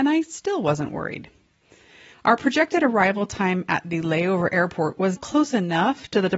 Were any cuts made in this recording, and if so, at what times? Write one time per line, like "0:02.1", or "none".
0:02.1
0:05.2